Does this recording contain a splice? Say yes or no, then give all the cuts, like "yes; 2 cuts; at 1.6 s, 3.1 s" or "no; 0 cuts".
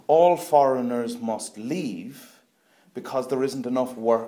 no; 0 cuts